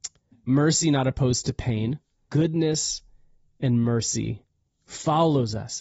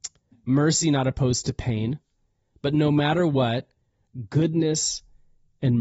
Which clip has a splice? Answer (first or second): first